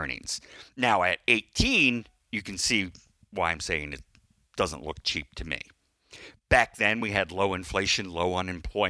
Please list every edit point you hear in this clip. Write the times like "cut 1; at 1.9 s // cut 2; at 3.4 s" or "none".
none